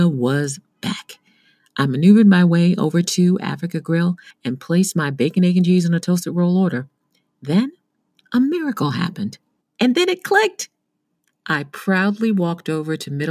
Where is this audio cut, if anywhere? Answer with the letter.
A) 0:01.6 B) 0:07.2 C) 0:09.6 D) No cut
C